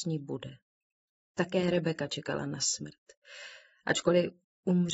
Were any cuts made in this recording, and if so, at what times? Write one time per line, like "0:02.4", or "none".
0:01.2